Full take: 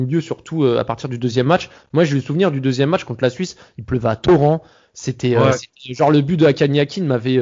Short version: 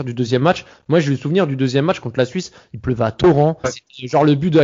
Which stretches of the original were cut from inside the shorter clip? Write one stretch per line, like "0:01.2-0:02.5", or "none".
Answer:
0:04.7-0:05.5